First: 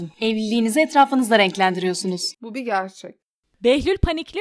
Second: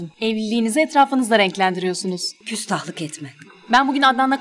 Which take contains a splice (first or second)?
first